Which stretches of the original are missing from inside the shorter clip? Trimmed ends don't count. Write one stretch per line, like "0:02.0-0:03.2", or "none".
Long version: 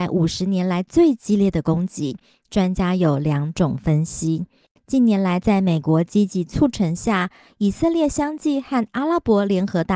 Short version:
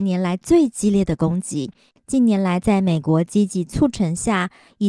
0:02.4-0:04.7